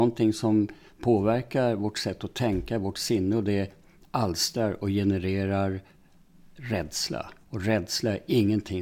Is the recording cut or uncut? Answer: cut